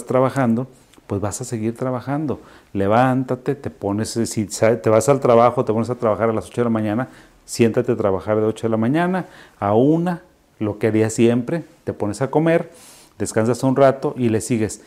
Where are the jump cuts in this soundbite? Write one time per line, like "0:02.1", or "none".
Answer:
none